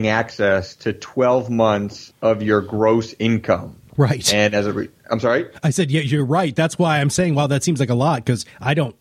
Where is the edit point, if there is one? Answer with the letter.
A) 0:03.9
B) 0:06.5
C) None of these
A